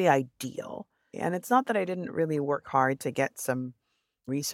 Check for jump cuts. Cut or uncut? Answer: cut